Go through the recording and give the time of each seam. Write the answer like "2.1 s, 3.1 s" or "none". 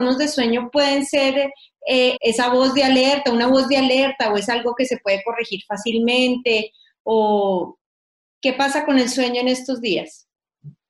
2.2 s